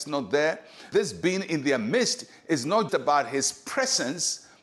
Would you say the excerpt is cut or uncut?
cut